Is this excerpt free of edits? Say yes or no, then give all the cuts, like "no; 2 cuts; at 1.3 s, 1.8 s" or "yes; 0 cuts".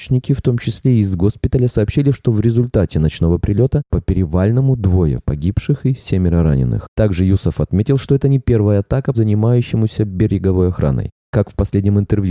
no; 1 cut; at 9.1 s